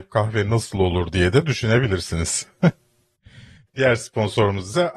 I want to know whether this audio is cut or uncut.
uncut